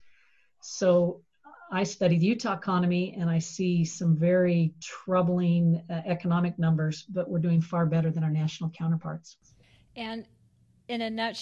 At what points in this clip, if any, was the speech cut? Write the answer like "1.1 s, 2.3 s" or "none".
none